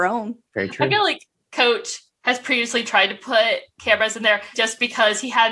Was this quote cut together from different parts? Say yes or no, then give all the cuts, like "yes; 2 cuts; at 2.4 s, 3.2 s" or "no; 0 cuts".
yes; 1 cut; at 4.5 s